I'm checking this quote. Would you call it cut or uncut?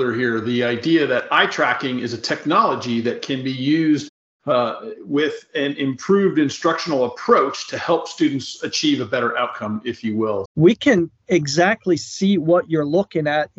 cut